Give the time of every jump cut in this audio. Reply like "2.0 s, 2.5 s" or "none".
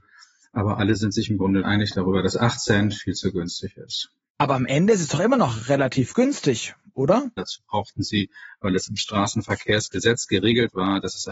7.4 s

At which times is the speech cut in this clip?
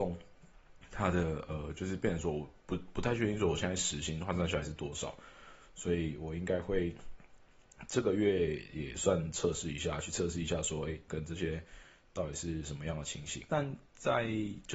11.1 s, 13.5 s

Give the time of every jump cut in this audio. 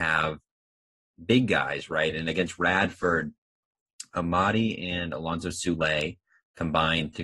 none

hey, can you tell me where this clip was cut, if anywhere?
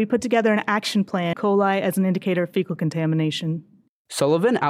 1.3 s

